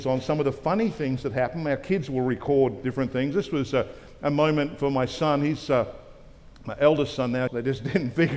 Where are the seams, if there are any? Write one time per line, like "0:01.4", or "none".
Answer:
0:07.5